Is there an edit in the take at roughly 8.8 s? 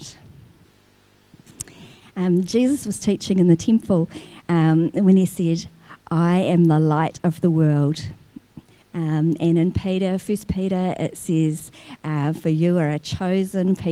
yes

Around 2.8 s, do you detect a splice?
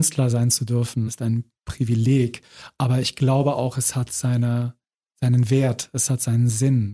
no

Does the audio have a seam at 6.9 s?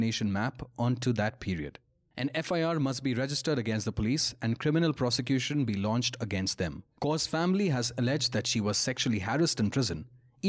yes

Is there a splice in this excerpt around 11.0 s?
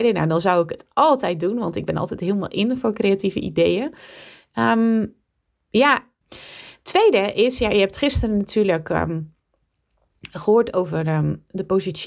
no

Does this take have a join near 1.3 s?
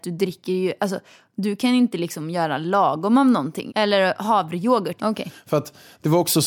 no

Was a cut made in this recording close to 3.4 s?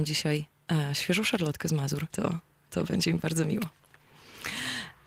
no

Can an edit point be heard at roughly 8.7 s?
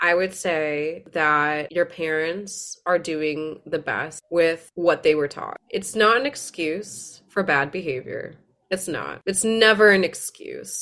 no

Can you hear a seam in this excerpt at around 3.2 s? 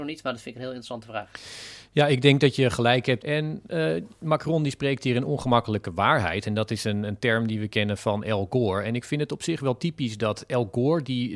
yes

